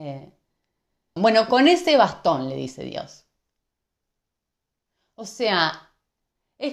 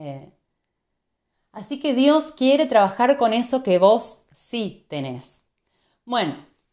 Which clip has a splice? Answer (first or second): first